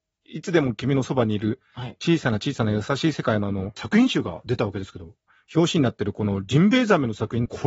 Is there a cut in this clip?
no; 0 cuts

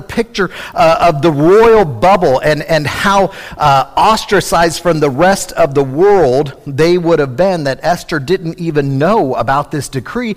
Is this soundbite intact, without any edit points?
yes; 0 cuts

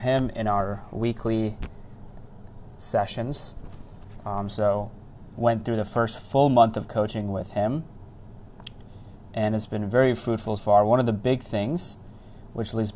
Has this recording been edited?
yes; 1 cut; at 10.6 s

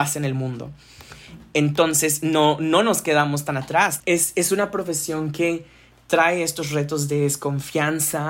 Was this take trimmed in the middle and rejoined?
yes; 1 cut; at 4.0 s

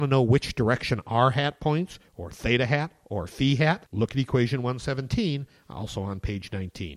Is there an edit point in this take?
no; 0 cuts

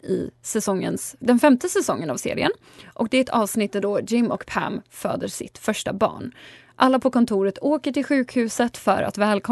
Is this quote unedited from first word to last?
no; 1 cut; at 1.2 s

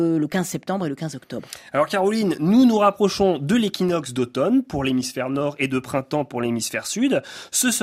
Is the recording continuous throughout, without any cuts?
yes; 0 cuts

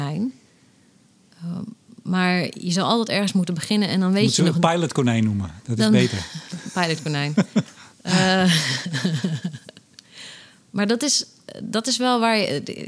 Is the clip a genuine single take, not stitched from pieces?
yes; 0 cuts

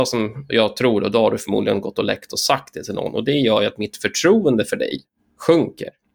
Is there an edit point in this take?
no; 0 cuts

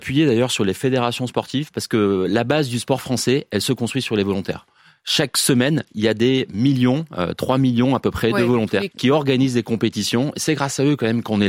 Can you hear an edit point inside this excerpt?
yes; 1 cut; at 8.9 s

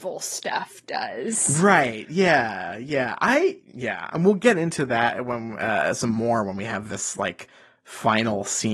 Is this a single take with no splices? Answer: yes; 0 cuts

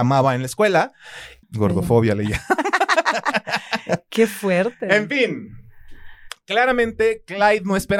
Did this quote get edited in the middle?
yes; 1 cut; at 1.4 s

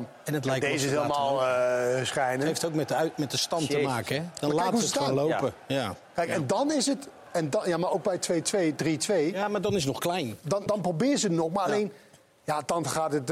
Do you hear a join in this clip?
yes; 1 cut; at 10.7 s

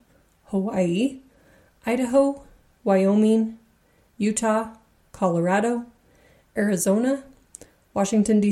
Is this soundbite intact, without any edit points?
yes; 0 cuts

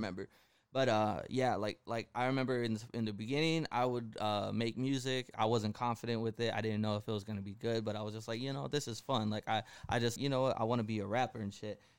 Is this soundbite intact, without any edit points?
no; 2 cuts; at 5.3 s, 10.2 s

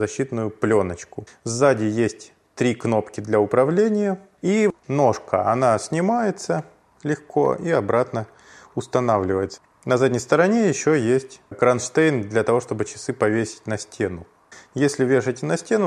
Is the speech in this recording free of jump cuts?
yes; 0 cuts

